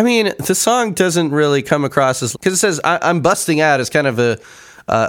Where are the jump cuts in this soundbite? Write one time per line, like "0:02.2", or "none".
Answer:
0:02.3

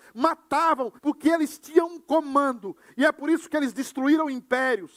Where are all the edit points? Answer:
0:01.0
0:02.8

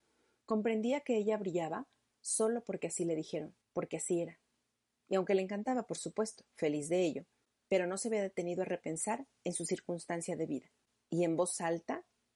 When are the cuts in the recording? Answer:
0:03.6

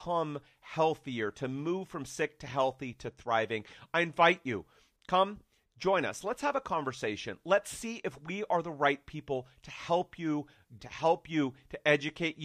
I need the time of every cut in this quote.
0:10.8

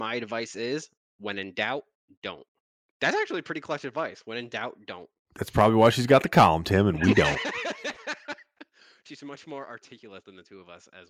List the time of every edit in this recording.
none

